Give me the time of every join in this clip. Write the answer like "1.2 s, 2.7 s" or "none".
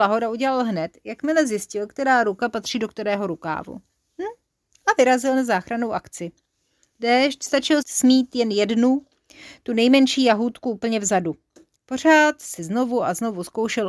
7.8 s, 11.8 s